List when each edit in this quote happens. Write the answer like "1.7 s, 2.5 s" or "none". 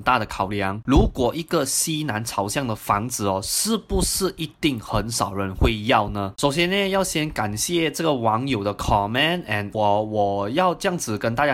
9.7 s